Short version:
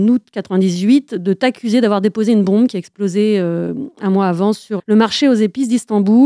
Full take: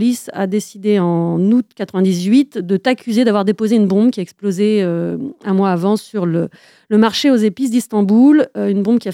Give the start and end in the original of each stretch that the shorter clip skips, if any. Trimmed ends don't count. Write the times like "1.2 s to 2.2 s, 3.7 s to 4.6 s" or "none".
6.2 s to 6.8 s